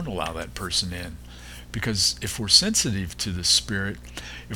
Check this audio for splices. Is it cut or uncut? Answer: uncut